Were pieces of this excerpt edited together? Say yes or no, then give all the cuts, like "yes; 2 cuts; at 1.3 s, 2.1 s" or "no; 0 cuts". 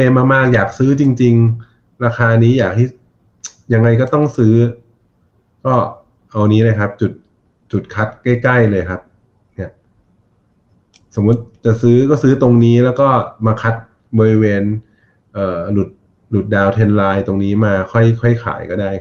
no; 0 cuts